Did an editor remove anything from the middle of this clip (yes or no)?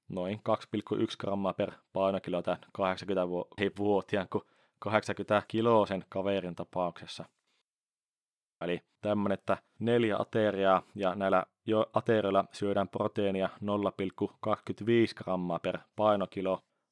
yes